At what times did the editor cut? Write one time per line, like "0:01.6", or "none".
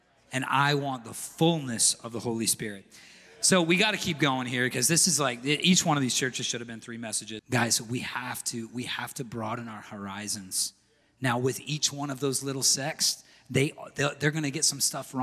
0:07.4